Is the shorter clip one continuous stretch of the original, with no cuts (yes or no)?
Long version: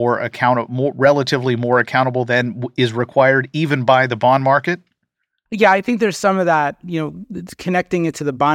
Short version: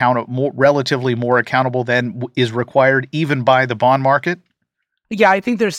yes